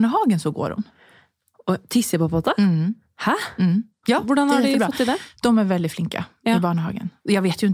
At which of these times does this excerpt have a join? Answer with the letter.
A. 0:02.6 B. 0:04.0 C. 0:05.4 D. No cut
B